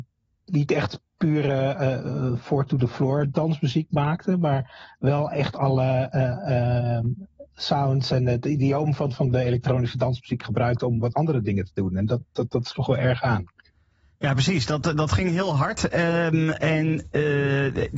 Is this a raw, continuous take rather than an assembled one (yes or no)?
yes